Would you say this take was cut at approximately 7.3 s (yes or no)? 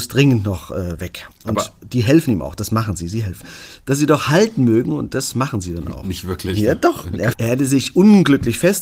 yes